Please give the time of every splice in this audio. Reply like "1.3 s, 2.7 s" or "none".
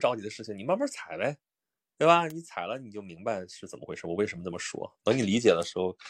none